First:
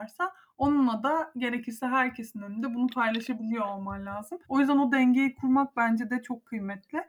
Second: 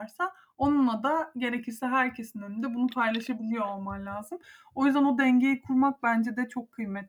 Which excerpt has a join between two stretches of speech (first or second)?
first